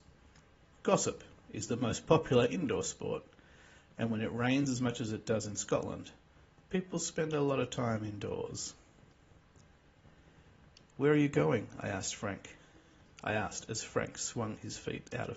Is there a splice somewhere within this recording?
no; 0 cuts

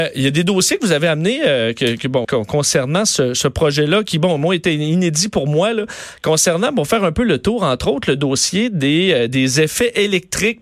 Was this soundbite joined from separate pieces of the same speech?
yes; 1 cut; at 2.2 s

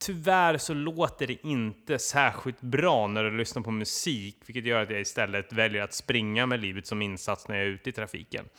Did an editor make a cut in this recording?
no; 0 cuts

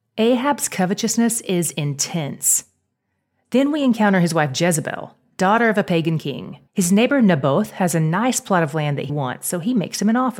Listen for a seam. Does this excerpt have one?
yes; 2 cuts; at 6.7 s, 9.1 s

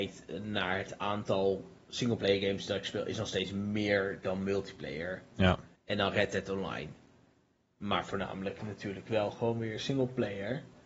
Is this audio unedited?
no; 1 cut; at 5.7 s

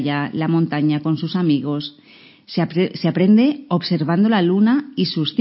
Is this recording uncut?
yes; 0 cuts

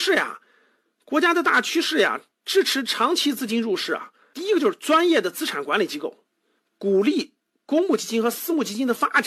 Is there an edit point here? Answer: yes; 2 cuts; at 4.3 s, 6.6 s

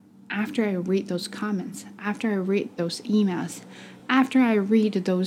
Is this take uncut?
yes; 0 cuts

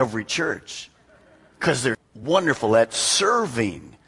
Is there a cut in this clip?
yes; 1 cut; at 1.9 s

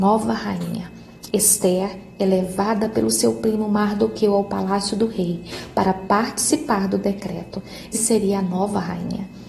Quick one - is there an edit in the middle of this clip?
yes; 2 cuts; at 1.3 s, 7.9 s

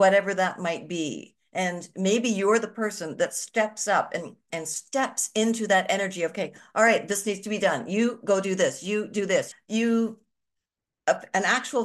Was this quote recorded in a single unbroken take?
no; 2 cuts; at 4.5 s, 9.5 s

